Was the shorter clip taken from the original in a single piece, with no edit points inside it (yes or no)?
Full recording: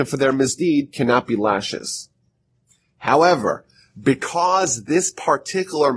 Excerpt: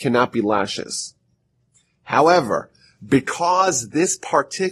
yes